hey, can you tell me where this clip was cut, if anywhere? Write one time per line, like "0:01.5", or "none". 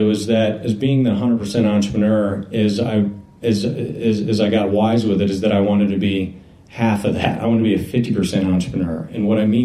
none